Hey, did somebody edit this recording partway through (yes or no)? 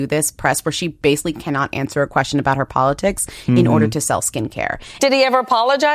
yes